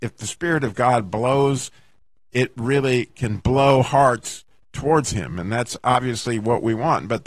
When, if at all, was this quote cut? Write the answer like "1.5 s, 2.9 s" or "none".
none